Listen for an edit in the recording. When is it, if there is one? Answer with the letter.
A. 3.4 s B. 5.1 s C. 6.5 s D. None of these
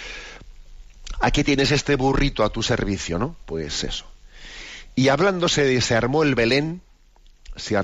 A